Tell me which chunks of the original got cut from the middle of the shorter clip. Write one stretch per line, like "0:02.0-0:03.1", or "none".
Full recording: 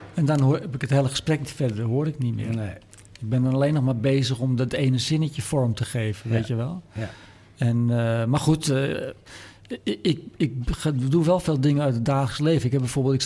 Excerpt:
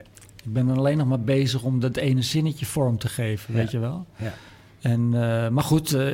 none